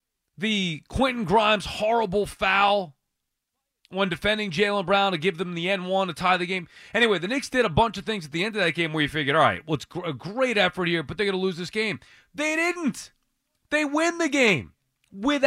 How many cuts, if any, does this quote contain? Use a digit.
0